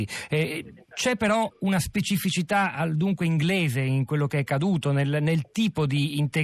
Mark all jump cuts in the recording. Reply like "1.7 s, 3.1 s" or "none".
none